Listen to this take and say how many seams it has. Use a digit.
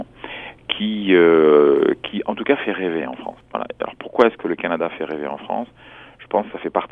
0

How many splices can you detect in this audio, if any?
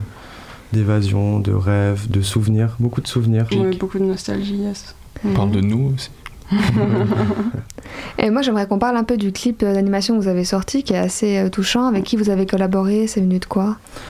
2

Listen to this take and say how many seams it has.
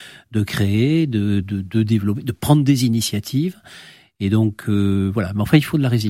1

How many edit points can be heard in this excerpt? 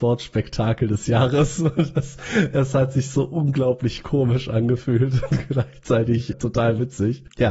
1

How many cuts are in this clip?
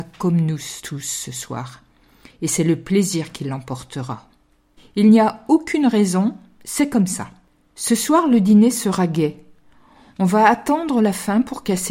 1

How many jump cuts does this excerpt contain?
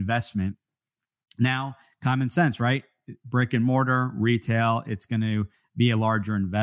0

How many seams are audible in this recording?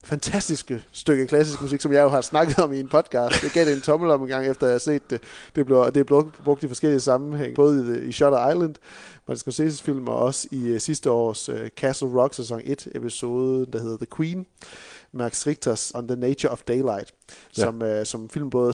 2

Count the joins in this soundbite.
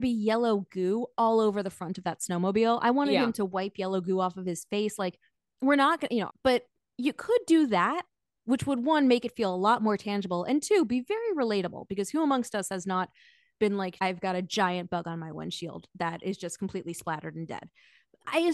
2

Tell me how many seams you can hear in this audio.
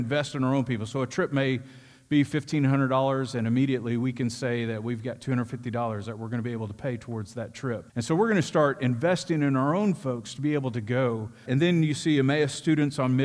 2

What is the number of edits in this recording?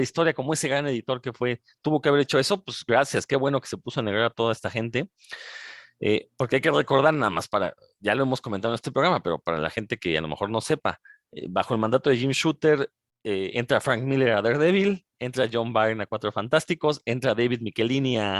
0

